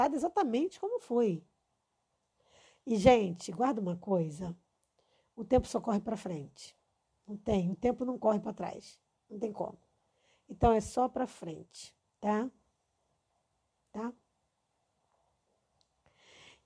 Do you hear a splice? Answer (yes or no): no